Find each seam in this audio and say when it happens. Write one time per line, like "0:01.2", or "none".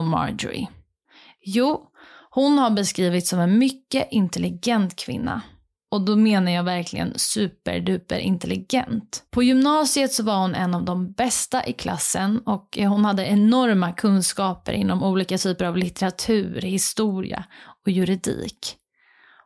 0:09.3